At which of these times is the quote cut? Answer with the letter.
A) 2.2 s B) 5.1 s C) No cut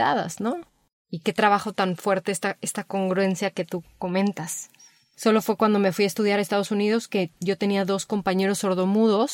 B